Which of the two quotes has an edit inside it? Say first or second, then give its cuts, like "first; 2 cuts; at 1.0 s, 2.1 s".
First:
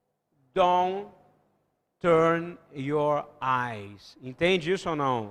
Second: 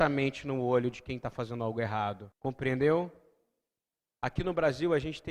second; 1 cut; at 2.3 s